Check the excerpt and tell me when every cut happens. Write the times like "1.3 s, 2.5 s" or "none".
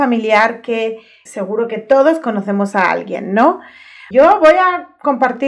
1.3 s, 4.1 s